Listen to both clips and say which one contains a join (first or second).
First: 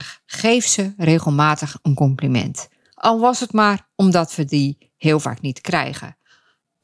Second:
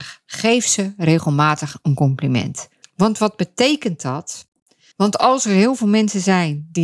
second